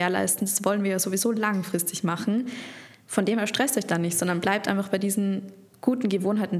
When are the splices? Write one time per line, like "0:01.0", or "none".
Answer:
none